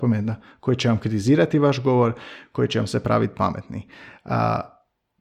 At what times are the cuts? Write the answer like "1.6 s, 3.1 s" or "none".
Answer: none